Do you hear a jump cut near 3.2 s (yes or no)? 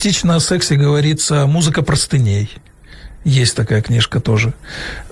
no